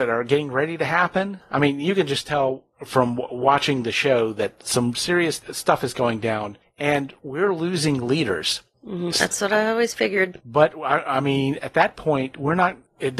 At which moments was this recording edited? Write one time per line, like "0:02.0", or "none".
0:09.1